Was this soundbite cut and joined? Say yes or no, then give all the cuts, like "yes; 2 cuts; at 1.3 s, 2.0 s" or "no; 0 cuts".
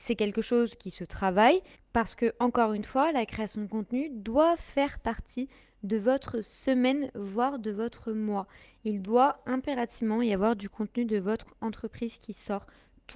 no; 0 cuts